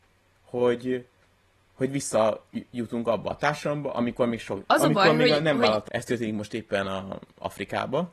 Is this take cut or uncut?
cut